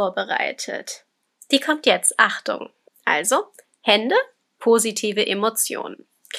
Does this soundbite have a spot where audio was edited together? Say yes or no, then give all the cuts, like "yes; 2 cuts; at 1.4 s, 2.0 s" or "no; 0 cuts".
yes; 2 cuts; at 2.9 s, 4.5 s